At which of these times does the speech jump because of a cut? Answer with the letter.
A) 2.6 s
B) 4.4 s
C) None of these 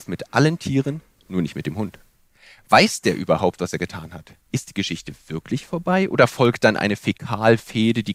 B